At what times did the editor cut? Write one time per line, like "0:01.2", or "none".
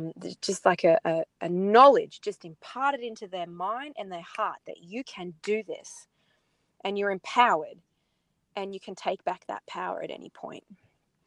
none